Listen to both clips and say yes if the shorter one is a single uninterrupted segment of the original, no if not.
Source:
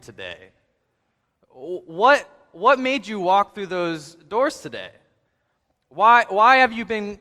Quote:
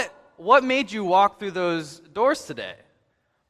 yes